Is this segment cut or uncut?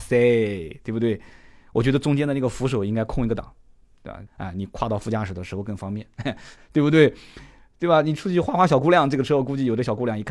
cut